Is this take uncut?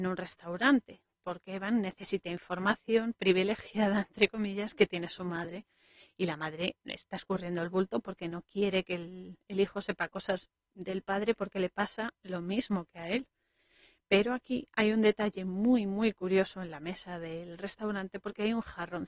yes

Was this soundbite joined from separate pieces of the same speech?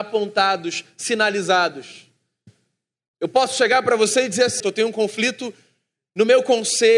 yes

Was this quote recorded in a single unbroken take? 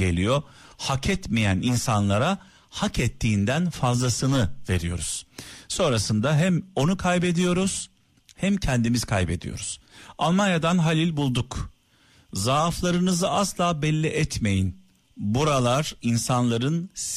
yes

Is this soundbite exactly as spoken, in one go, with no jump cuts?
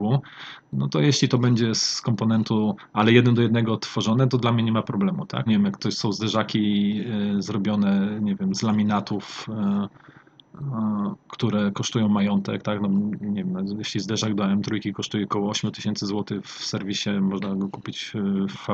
no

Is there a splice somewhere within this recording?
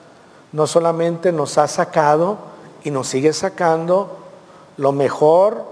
no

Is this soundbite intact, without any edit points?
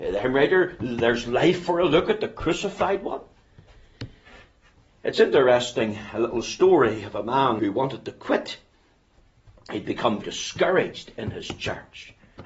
no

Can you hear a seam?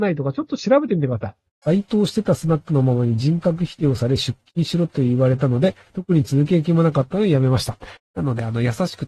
yes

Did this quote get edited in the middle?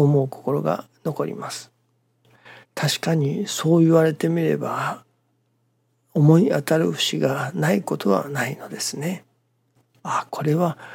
yes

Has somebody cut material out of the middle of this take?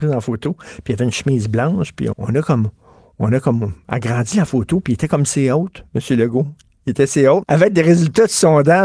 yes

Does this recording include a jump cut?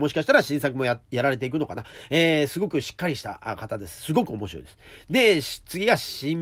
no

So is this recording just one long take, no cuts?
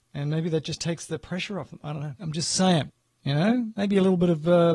no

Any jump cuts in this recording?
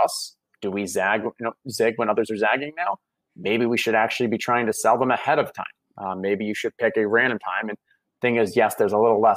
no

